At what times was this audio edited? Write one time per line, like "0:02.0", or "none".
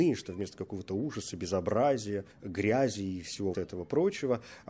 0:02.3
0:03.5